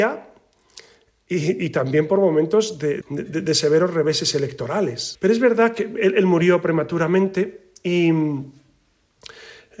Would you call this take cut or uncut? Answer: cut